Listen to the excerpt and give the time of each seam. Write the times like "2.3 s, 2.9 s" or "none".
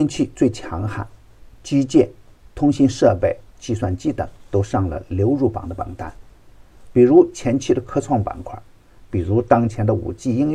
3.5 s, 6.9 s